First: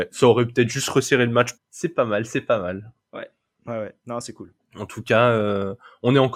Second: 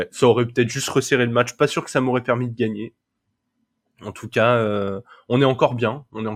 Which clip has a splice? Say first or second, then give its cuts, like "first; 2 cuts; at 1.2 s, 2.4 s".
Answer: first; 3 cuts; at 1.6 s, 3.0 s, 4.6 s